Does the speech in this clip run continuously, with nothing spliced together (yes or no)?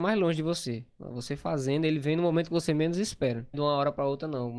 no